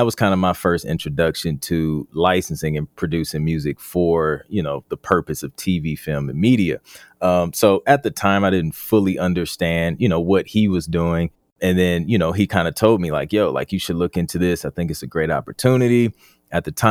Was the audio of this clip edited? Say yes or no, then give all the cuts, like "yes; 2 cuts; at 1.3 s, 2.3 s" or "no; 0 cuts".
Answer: no; 0 cuts